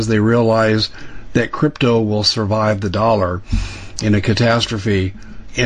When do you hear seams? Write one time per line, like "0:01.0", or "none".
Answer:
none